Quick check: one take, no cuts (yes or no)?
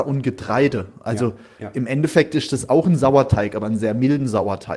yes